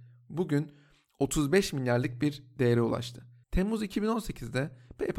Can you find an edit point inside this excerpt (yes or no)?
yes